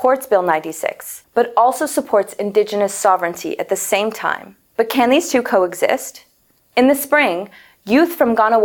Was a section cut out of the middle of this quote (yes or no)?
no